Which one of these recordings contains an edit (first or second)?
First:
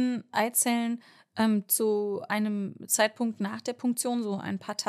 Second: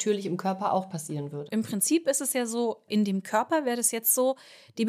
second